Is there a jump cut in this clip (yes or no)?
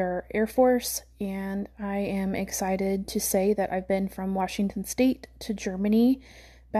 no